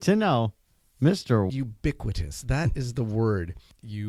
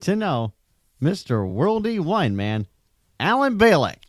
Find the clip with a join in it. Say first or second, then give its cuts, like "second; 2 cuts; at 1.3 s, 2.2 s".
first; 1 cut; at 1.5 s